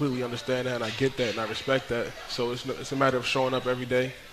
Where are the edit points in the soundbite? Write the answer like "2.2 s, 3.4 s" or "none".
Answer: none